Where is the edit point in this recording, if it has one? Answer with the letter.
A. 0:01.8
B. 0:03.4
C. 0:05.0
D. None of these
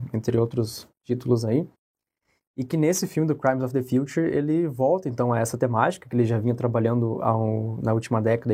D